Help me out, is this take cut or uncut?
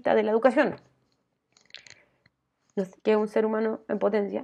cut